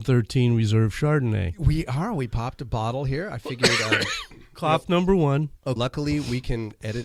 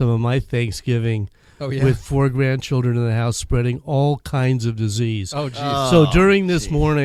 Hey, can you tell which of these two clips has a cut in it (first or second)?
first